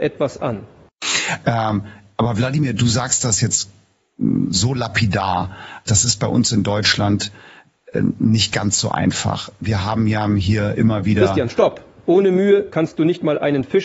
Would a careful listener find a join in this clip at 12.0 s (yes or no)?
yes